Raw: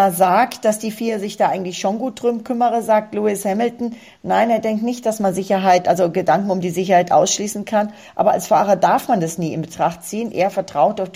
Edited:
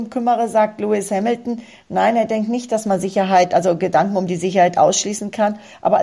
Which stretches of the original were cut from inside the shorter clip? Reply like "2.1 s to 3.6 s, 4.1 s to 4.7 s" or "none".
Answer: none

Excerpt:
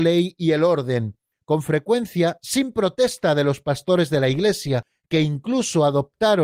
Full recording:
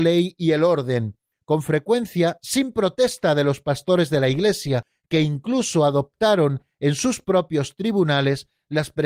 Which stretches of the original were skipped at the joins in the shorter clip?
none

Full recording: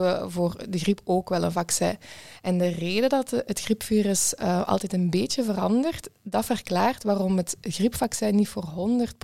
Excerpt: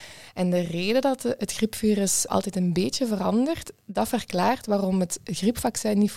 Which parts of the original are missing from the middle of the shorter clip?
4.4 s to 4.7 s

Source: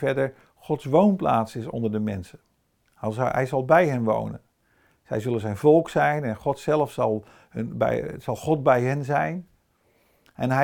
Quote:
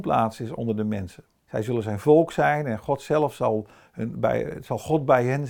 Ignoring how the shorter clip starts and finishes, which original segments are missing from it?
2.6 s to 5.0 s

